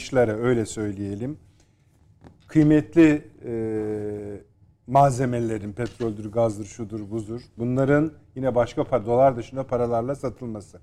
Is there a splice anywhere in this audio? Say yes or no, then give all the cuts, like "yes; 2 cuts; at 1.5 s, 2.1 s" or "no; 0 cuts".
no; 0 cuts